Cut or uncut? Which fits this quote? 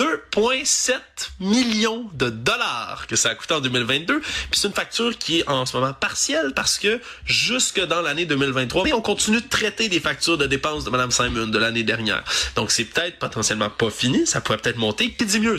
cut